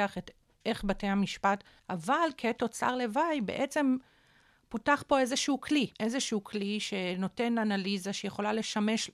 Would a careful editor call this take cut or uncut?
cut